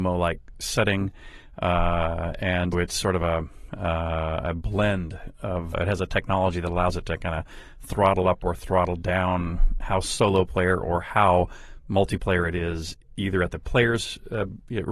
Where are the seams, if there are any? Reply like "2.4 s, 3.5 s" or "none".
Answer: 2.7 s, 5.7 s